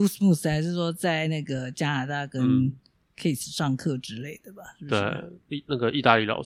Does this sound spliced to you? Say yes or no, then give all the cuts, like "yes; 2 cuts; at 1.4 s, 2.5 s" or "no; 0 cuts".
no; 0 cuts